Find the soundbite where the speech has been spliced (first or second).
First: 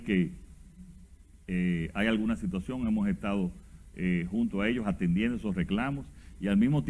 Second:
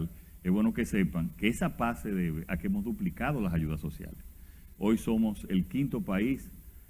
second